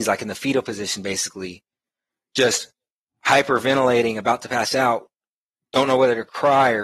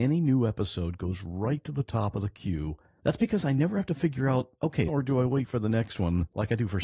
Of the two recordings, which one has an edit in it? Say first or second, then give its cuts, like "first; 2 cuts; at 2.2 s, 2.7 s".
second; 2 cuts; at 2.9 s, 4.9 s